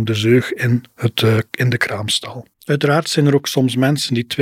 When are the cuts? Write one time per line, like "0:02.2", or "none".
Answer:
0:02.5